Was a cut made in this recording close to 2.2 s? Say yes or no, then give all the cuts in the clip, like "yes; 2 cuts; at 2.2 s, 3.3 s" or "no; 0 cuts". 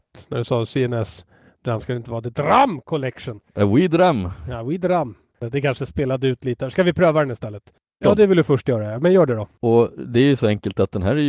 no; 2 cuts; at 8.0 s, 9.6 s